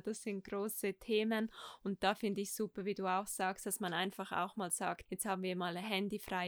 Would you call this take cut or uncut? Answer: cut